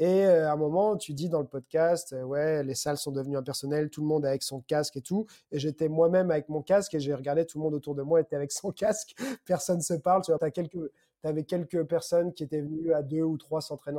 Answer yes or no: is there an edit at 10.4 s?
yes